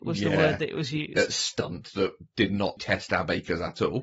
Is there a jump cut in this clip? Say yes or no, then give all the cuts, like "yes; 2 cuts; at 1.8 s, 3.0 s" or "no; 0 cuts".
yes; 1 cut; at 2.8 s